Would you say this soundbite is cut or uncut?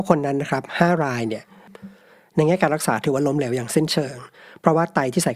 uncut